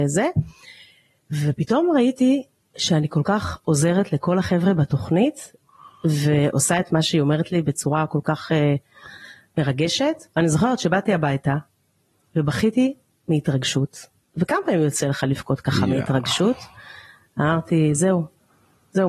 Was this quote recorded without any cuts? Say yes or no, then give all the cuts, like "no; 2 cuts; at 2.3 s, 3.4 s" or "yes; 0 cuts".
yes; 0 cuts